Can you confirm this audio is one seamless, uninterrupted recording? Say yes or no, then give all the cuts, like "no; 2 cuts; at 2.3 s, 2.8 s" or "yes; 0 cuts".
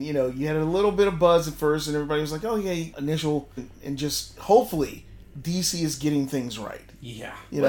no; 1 cut; at 3.6 s